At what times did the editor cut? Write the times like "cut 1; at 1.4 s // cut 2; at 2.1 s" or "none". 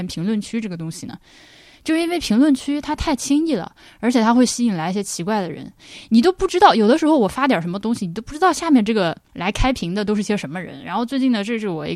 none